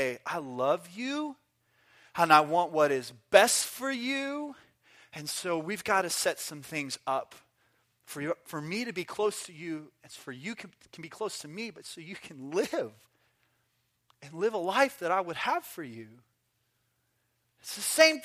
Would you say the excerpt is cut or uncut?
uncut